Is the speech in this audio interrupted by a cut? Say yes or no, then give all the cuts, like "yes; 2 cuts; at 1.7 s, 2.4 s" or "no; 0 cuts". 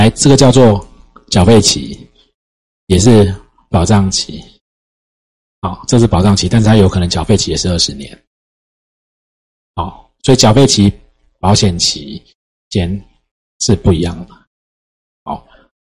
no; 0 cuts